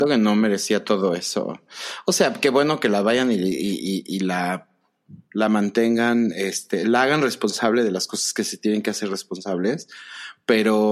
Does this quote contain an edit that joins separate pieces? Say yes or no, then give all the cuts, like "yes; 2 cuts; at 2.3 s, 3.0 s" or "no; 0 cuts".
no; 0 cuts